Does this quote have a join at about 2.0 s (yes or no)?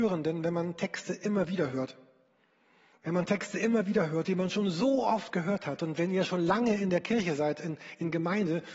no